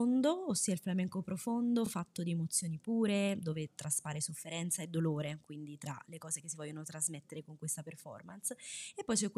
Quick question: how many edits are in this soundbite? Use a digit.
0